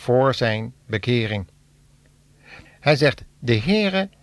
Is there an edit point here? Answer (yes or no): yes